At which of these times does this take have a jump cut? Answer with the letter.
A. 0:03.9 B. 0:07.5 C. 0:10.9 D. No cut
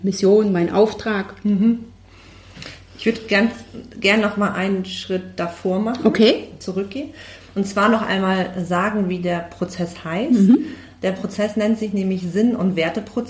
D